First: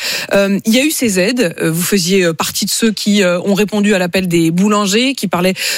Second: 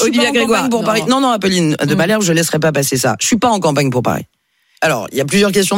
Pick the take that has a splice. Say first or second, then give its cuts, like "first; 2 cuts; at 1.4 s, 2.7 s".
second; 1 cut; at 4.8 s